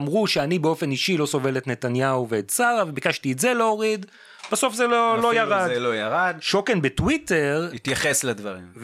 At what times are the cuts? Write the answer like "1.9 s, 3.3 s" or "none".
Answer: none